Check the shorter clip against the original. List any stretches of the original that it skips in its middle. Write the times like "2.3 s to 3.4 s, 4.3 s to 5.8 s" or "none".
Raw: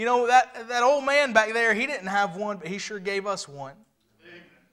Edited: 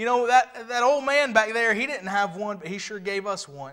none